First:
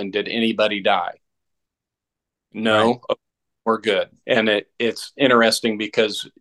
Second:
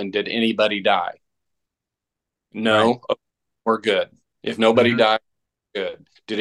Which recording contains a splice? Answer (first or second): first